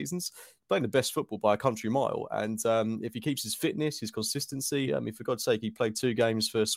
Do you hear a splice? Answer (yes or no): yes